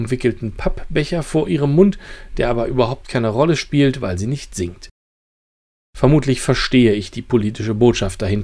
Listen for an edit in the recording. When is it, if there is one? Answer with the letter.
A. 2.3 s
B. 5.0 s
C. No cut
C